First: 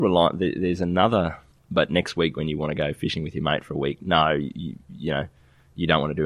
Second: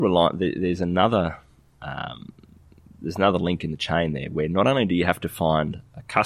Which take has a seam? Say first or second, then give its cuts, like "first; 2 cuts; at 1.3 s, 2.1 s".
first; 1 cut; at 1.5 s